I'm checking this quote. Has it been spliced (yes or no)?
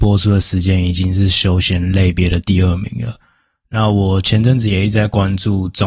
no